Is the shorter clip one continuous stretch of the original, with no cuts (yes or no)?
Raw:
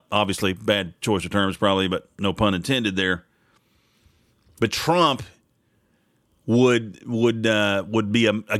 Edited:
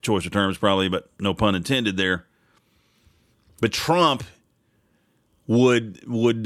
yes